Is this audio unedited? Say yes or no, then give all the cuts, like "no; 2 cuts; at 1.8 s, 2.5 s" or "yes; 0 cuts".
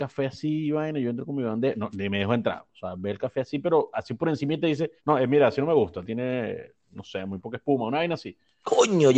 no; 2 cuts; at 5.0 s, 6.0 s